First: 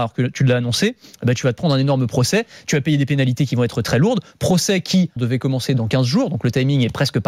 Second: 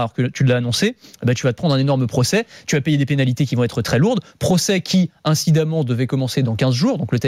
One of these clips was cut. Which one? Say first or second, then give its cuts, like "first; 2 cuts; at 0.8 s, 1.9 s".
first; 1 cut; at 5.2 s